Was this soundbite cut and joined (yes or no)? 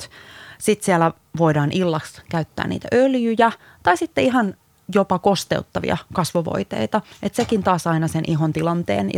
no